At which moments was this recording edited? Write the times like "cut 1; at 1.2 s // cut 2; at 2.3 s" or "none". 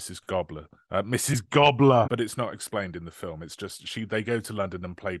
cut 1; at 2.0 s